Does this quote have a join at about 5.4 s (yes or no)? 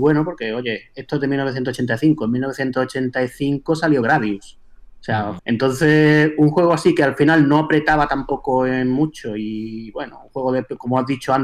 yes